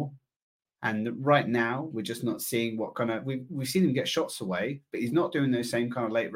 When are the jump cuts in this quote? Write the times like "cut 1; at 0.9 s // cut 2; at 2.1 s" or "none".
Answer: none